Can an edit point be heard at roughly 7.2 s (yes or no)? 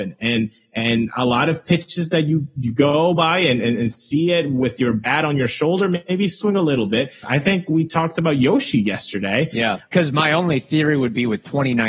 yes